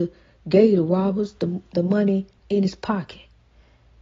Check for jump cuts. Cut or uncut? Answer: uncut